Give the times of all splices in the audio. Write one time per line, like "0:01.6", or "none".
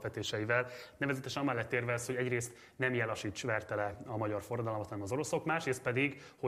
none